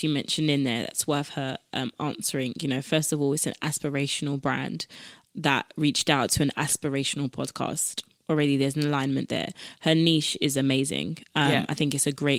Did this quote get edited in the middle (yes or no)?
yes